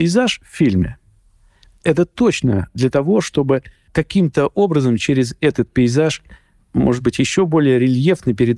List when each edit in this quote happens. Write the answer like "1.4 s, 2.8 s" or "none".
none